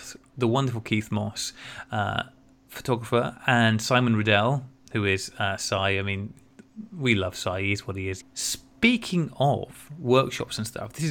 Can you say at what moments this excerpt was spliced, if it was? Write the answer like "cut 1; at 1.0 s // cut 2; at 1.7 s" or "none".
cut 1; at 8.2 s